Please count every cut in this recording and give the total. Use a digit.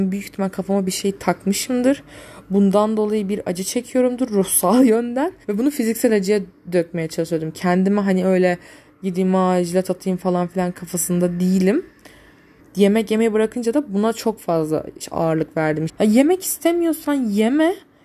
3